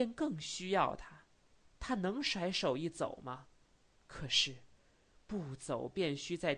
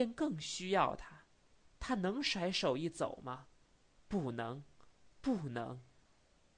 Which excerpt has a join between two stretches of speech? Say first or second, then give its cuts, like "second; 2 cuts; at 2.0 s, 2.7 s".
first; 1 cut; at 3.9 s